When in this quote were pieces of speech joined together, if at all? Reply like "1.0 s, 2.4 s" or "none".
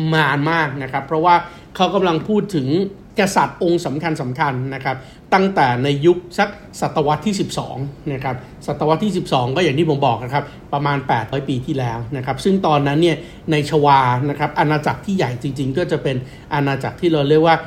3.1 s, 11.3 s